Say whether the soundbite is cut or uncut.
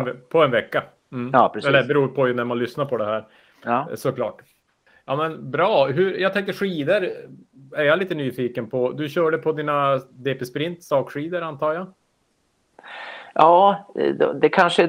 uncut